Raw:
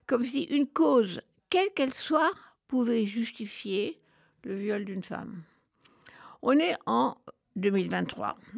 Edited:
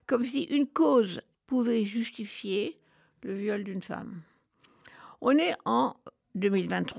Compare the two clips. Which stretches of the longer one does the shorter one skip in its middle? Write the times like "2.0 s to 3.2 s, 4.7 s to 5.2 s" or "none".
1.3 s to 2.6 s